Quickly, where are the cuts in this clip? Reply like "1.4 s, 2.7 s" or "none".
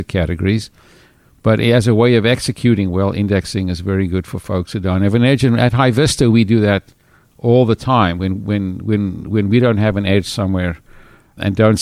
none